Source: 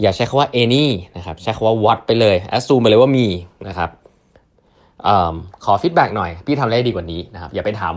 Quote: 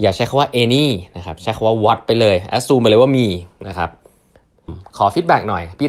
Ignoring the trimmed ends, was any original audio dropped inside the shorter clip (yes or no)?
yes